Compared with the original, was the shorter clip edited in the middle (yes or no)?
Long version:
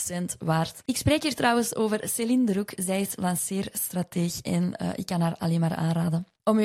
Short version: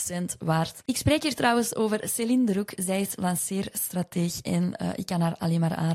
no